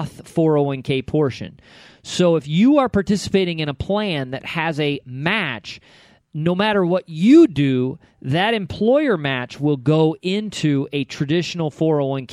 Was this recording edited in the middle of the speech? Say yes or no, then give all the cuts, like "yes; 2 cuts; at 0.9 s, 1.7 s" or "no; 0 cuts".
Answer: no; 0 cuts